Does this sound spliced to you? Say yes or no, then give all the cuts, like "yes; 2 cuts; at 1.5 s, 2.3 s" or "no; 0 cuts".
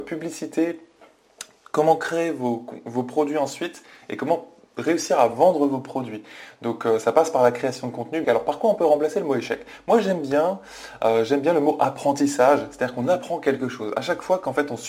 yes; 1 cut; at 8.2 s